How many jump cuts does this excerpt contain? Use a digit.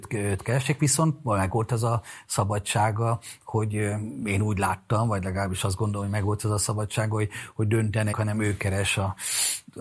1